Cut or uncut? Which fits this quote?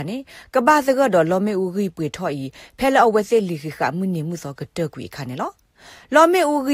uncut